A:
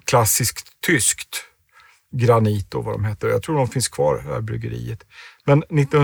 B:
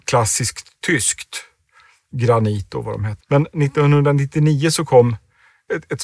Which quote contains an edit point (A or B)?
B